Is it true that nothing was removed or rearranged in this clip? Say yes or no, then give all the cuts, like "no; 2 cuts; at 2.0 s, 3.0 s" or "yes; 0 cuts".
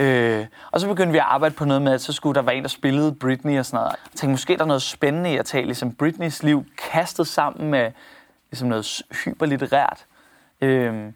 no; 1 cut; at 3.9 s